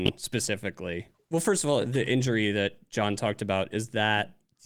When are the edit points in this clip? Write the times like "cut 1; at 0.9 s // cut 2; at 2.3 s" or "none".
cut 1; at 1.1 s